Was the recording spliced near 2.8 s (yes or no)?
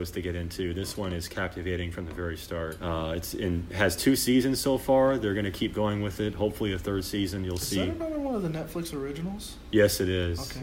yes